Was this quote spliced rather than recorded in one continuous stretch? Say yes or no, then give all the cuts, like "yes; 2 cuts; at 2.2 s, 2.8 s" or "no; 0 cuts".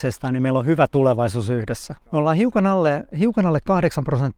yes; 1 cut; at 2.0 s